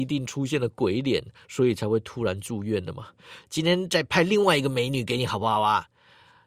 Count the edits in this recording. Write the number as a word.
two